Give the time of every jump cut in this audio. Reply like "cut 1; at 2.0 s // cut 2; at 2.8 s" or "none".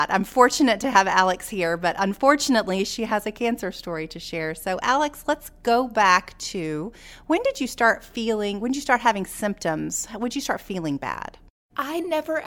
none